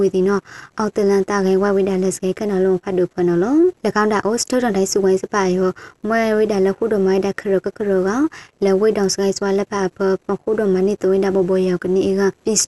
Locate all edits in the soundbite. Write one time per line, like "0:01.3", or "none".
0:03.8